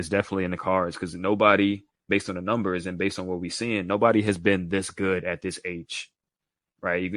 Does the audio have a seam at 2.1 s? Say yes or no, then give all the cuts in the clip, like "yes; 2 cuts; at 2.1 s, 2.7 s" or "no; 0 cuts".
yes; 1 cut; at 2.1 s